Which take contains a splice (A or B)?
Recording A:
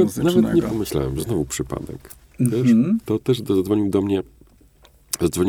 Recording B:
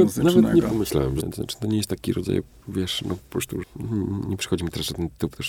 B